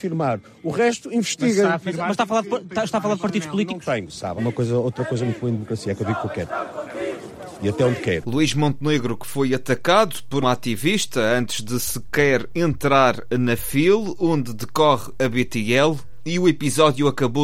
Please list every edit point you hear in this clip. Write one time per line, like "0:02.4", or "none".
0:04.4
0:08.2
0:10.4